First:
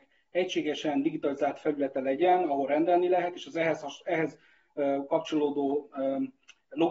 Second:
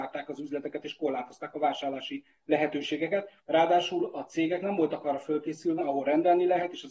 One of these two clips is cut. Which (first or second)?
second